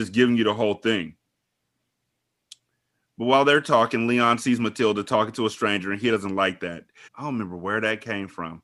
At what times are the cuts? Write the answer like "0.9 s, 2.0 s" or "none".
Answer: 7.1 s